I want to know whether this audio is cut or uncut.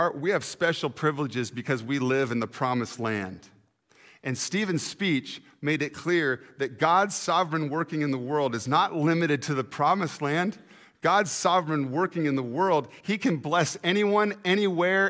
uncut